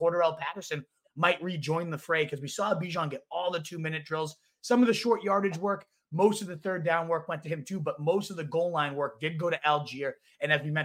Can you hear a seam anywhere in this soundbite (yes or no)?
yes